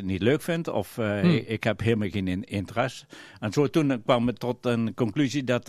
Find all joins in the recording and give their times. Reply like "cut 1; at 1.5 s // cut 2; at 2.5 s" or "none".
none